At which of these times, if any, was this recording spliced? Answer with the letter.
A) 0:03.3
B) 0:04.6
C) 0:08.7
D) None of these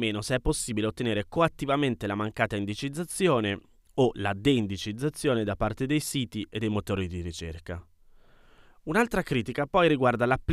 D